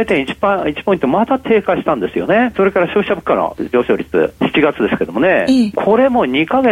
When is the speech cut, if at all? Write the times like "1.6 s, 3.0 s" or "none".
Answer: 2.5 s, 4.4 s, 5.7 s